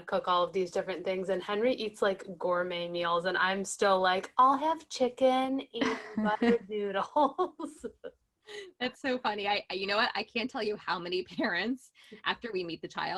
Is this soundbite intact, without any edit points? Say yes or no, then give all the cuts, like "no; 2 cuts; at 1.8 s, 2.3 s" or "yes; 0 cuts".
yes; 0 cuts